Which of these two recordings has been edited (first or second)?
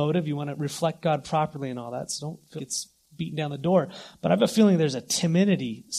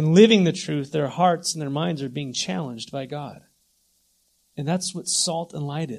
first